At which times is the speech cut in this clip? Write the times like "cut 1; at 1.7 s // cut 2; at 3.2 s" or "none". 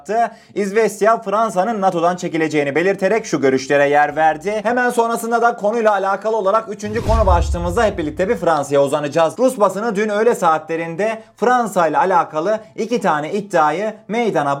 cut 1; at 4.6 s